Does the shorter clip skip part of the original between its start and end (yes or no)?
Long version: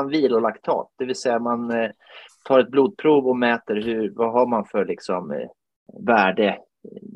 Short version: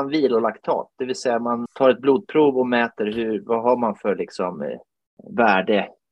yes